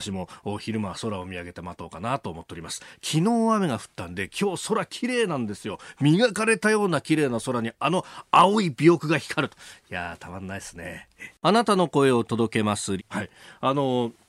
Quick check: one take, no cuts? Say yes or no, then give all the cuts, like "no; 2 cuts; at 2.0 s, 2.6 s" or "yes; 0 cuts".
no; 2 cuts; at 11.4 s, 13.0 s